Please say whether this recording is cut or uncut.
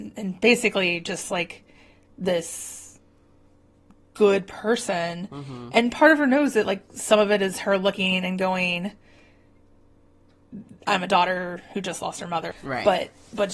cut